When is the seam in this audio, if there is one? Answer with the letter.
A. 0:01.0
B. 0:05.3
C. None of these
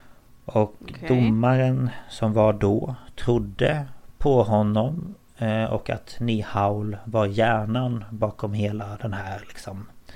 C